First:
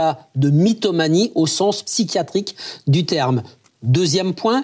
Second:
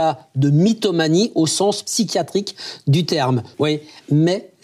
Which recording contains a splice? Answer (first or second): second